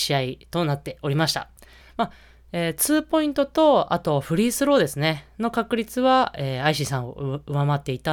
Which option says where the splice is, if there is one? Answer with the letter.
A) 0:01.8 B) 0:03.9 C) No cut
A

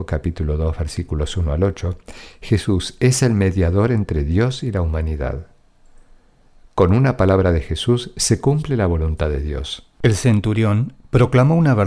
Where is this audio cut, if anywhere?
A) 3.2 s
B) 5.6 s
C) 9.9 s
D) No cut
C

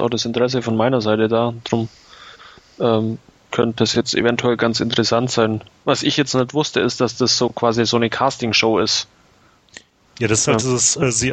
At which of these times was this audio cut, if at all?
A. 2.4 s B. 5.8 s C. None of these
C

